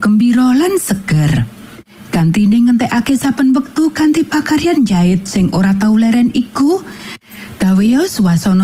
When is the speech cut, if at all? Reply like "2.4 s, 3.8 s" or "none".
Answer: none